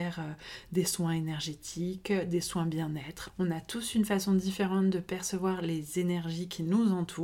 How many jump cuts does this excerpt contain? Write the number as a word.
one